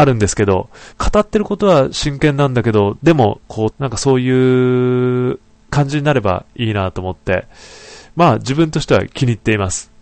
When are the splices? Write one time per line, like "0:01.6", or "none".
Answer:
0:00.9
0:03.7